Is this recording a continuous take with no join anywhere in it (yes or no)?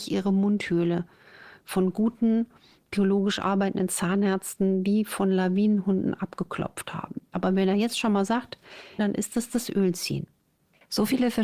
no